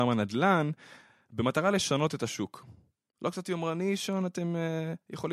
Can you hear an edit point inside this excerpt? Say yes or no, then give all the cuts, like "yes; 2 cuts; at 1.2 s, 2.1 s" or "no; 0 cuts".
no; 0 cuts